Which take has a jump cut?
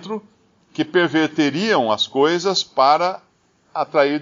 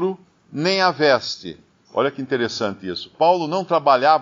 second; 1 cut; at 1.8 s

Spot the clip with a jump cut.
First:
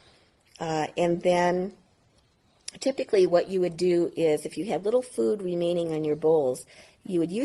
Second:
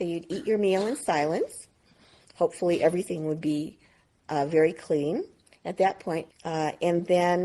second; 2 cuts; at 2.2 s, 6.3 s

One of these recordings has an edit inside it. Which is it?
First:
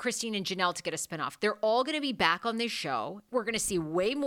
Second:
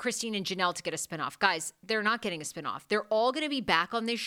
first; 2 cuts; at 1.4 s, 3.3 s

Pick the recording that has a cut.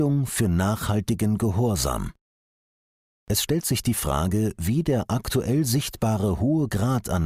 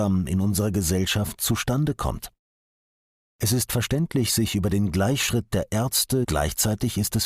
second; 1 cut; at 6.2 s

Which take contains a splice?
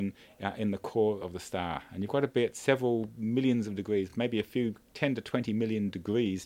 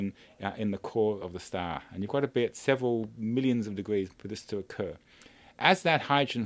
second; 1 cut; at 4.1 s

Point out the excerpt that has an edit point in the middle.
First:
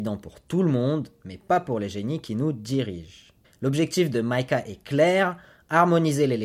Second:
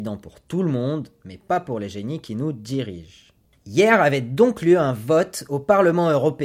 first; 1 cut; at 3.4 s

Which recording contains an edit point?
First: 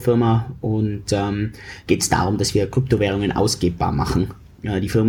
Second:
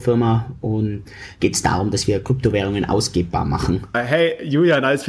second; 2 cuts; at 1.1 s, 3.9 s

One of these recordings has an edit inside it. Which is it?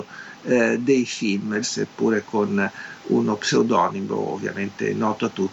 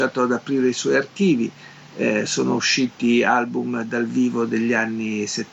first; 1 cut; at 1.6 s

